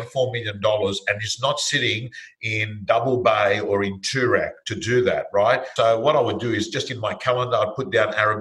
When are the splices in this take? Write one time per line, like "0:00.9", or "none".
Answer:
0:05.8